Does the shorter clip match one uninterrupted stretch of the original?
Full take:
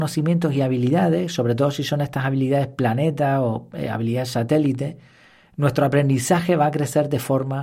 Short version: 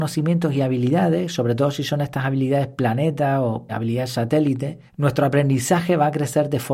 no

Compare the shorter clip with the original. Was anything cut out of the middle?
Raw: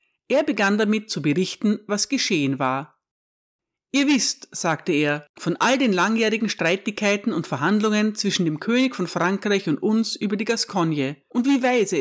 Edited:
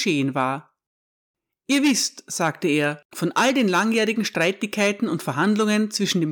no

